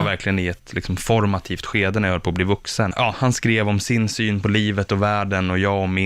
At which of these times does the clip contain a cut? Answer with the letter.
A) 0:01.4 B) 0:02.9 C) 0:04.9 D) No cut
B